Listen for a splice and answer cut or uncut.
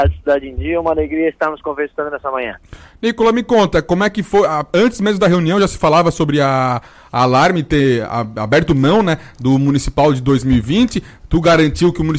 uncut